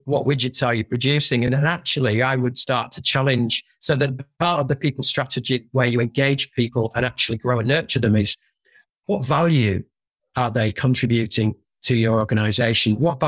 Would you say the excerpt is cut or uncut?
uncut